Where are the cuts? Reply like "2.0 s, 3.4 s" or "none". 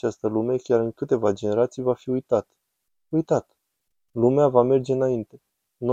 none